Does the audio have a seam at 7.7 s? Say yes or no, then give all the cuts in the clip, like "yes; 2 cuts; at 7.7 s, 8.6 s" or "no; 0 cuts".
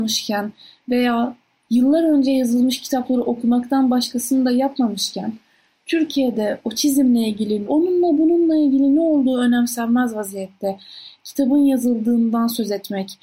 yes; 1 cut; at 7.7 s